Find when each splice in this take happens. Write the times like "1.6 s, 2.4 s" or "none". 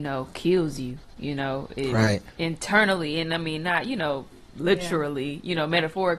none